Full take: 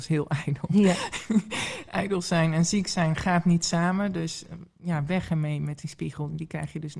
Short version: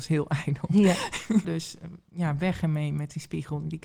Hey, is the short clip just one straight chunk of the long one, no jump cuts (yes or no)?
no